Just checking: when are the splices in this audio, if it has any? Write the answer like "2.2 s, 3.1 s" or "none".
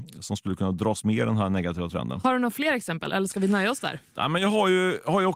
none